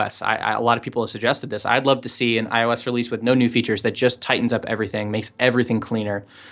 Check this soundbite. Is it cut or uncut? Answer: uncut